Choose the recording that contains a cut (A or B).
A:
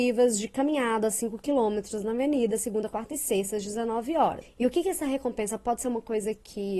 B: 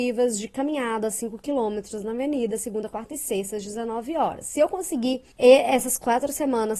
A